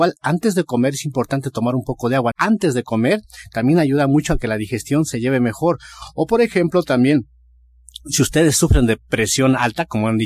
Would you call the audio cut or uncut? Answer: cut